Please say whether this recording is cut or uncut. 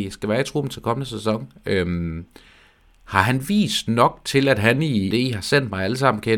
cut